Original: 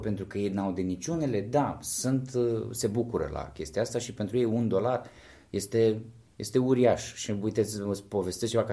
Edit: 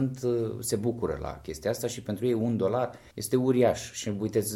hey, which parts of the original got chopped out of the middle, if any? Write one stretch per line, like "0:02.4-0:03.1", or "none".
0:05.2-0:06.3

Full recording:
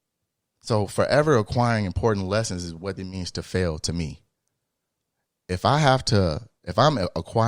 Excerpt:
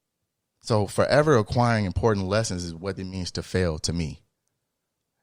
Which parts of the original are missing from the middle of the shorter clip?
none

